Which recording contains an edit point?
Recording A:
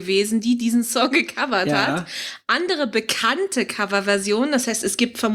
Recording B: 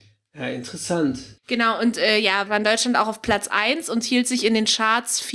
B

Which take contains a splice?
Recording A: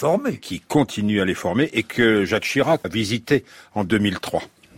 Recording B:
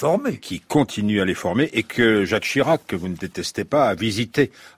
A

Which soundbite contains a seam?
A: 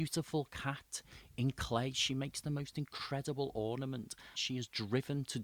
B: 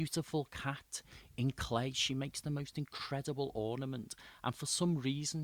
A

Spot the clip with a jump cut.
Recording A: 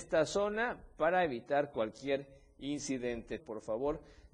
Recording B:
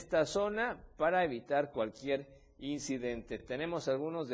A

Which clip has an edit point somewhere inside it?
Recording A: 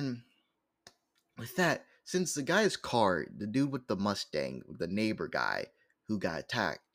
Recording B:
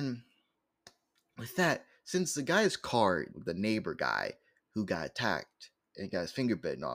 B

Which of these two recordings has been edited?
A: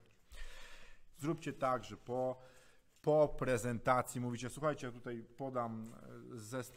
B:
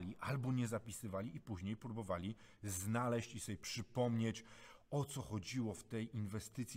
A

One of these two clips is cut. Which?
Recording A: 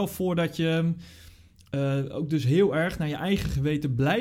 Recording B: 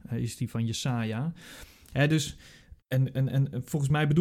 B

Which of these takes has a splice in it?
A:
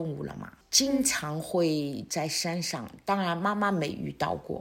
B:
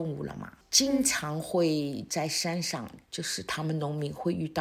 B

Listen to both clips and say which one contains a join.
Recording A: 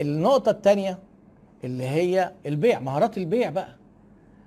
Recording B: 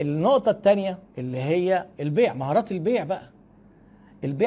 B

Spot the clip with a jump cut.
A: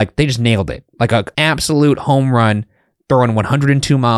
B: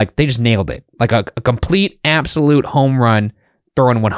A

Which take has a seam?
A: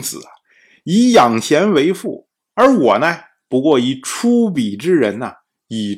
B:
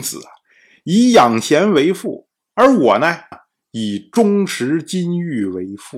B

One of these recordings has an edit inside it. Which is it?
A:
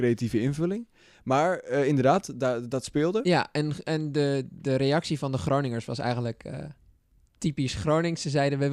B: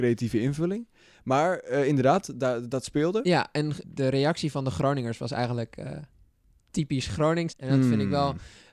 B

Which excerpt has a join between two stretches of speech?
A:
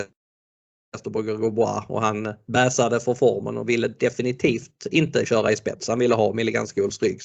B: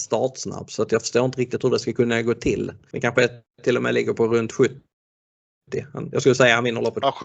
B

